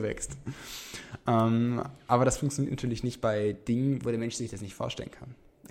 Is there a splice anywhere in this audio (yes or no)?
no